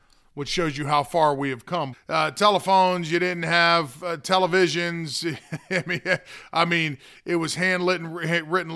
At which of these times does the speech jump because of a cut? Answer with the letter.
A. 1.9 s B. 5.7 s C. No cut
A